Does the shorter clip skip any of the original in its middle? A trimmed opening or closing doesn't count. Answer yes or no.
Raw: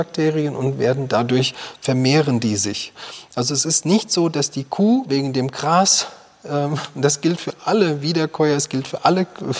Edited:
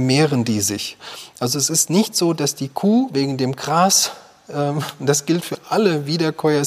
no